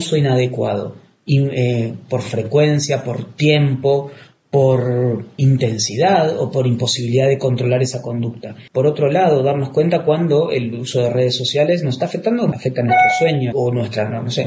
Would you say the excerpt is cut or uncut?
cut